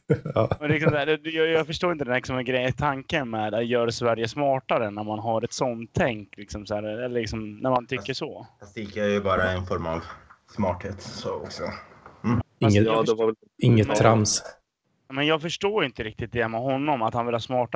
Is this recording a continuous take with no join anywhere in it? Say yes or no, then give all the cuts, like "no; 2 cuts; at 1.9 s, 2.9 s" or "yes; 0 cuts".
no; 1 cut; at 12.4 s